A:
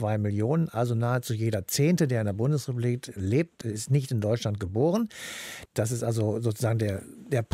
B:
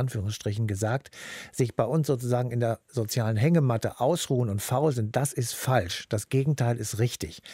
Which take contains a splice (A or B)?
A